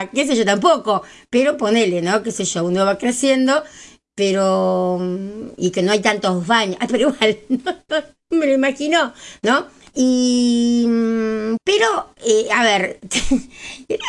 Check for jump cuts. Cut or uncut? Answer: cut